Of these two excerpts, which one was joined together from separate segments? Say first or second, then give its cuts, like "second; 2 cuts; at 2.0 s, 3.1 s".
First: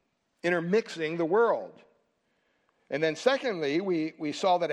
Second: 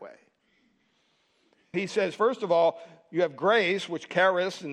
second; 1 cut; at 1.7 s